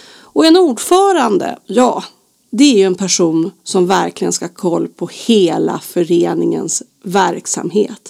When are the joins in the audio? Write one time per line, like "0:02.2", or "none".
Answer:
none